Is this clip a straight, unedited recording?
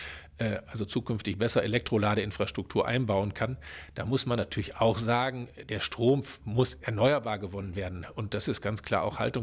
yes; 0 cuts

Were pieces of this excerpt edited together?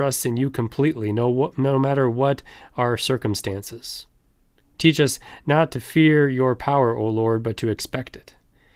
no; 0 cuts

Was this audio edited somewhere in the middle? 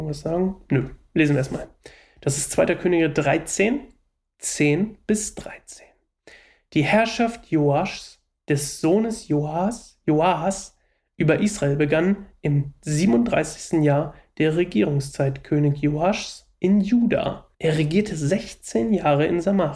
yes; 1 cut; at 17.5 s

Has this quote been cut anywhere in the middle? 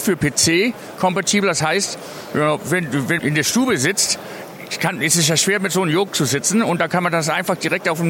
yes; 1 cut; at 3.2 s

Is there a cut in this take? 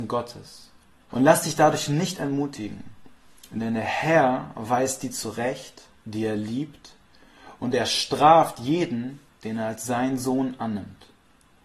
yes; 1 cut; at 1.1 s

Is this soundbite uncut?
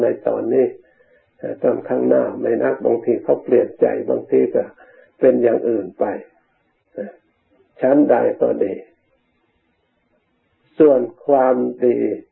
no; 1 cut; at 2.6 s

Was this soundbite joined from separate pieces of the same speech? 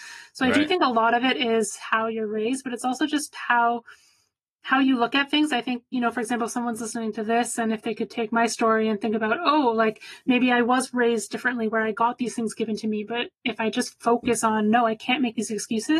no; 0 cuts

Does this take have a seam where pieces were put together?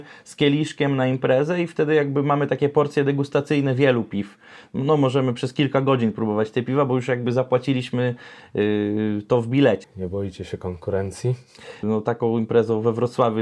yes; 2 cuts; at 9.8 s, 11.8 s

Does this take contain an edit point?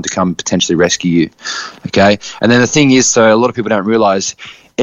no; 0 cuts

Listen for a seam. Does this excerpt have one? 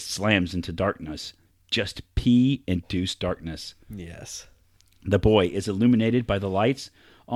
no; 0 cuts

